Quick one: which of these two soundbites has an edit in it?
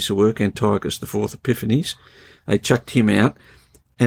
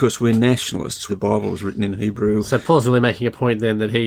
second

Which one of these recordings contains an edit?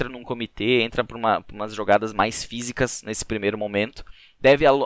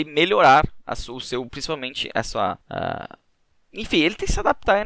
second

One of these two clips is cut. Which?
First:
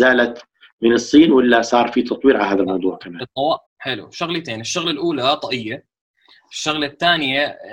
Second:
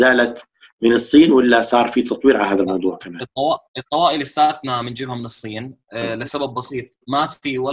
first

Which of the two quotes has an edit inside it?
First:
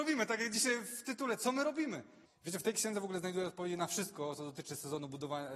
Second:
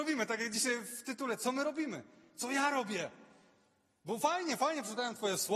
first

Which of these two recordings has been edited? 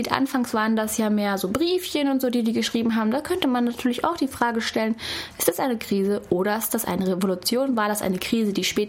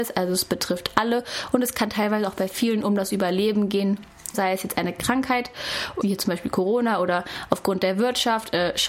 second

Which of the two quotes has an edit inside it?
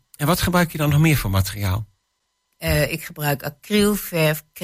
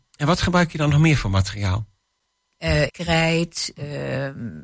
second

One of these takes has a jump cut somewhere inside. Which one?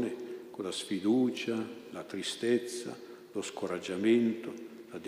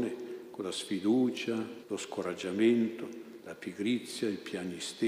second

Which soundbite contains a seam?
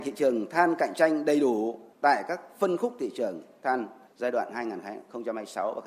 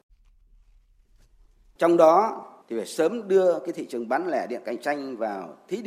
second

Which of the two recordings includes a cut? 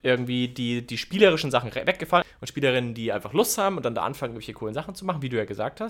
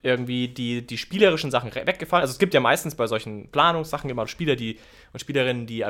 first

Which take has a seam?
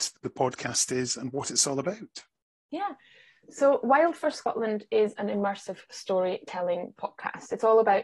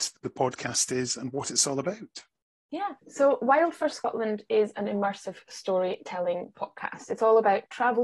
second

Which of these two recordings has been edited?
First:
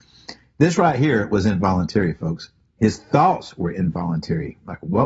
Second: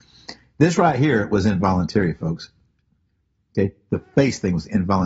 first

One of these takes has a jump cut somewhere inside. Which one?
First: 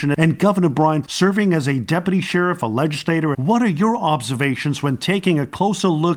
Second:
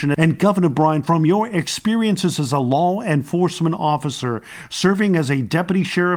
first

